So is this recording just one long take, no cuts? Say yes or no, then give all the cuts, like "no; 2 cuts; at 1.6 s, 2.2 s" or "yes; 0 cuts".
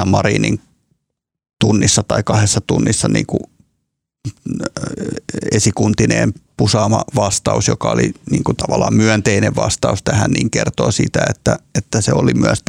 yes; 0 cuts